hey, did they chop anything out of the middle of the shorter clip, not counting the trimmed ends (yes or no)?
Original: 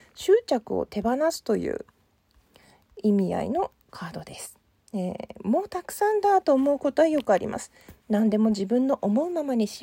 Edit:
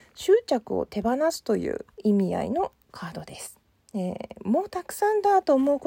yes